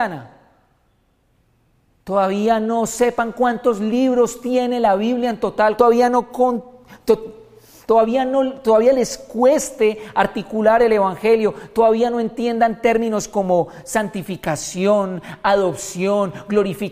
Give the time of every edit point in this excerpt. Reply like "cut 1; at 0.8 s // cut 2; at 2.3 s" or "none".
cut 1; at 5.8 s